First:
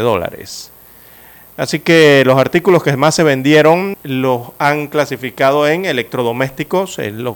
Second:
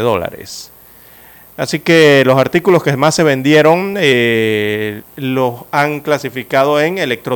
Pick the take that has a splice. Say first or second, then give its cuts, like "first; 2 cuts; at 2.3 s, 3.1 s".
first; 1 cut; at 3.9 s